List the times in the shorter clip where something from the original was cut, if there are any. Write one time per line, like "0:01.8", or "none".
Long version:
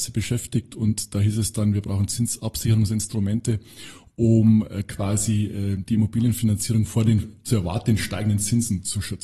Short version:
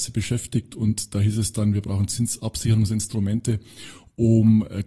none